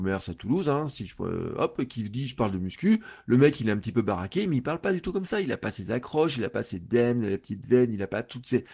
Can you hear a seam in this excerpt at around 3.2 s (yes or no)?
no